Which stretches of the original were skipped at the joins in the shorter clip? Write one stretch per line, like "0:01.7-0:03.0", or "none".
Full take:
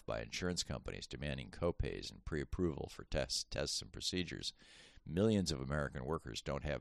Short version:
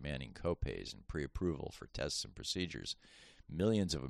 0:03.1-0:03.5